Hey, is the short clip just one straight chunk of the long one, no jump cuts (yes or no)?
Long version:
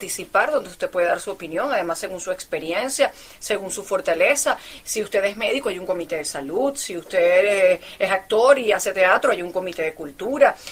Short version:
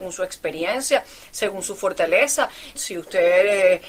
no